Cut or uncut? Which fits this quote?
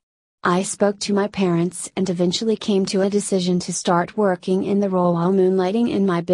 uncut